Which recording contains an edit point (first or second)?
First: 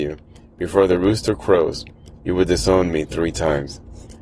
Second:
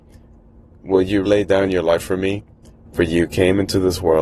second